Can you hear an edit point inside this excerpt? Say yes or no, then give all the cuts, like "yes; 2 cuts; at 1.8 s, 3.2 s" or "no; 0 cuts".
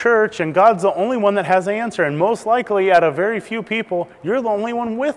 no; 0 cuts